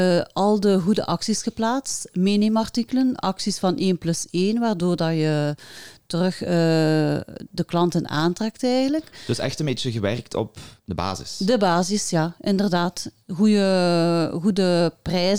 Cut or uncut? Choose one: uncut